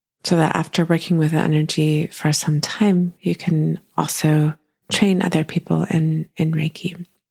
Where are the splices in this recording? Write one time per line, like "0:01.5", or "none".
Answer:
none